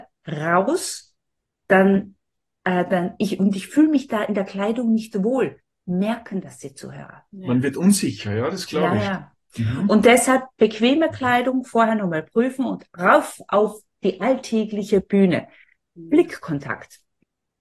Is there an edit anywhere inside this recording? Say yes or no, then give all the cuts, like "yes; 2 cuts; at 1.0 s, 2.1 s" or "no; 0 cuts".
no; 0 cuts